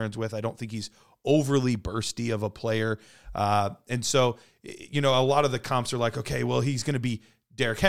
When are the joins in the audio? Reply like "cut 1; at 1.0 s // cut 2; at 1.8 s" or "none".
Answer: none